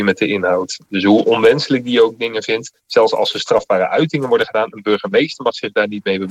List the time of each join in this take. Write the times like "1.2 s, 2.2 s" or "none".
none